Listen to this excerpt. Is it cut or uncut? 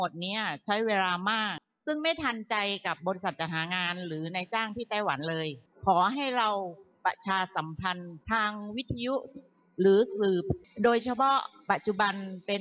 cut